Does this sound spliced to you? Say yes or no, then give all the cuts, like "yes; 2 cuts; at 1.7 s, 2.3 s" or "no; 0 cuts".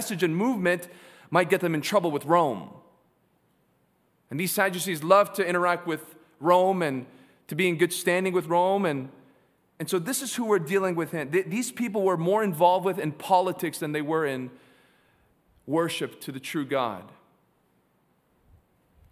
no; 0 cuts